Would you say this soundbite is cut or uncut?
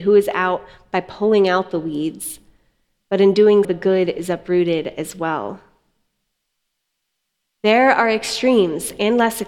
cut